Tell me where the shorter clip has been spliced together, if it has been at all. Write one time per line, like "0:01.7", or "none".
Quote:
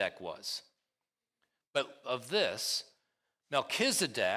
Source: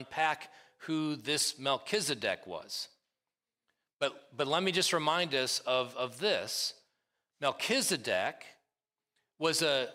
0:02.0